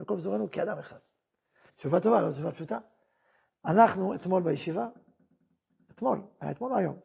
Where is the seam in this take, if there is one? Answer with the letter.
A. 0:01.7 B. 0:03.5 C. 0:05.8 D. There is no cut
A